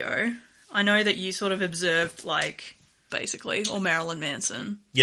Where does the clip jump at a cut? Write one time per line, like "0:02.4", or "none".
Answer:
0:03.1